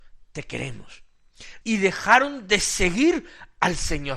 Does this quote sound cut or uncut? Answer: cut